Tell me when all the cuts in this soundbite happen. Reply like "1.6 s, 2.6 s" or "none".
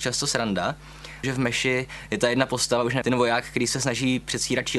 1.2 s, 3.0 s